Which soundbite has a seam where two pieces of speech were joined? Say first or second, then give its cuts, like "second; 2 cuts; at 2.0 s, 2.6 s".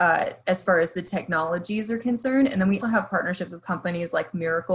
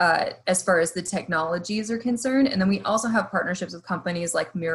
first; 1 cut; at 2.8 s